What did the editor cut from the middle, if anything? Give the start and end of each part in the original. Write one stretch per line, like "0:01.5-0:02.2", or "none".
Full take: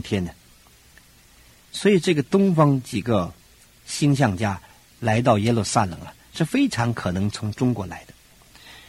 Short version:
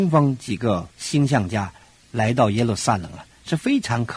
0:03.4-0:03.8